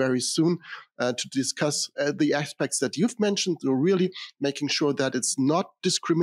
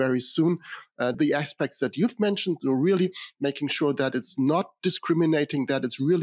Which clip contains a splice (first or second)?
second